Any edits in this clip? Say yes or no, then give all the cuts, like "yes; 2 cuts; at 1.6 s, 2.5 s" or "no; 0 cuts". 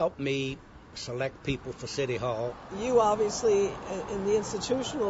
yes; 1 cut; at 2.7 s